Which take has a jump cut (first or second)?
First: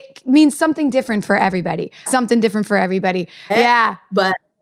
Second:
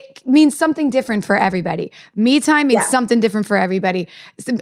first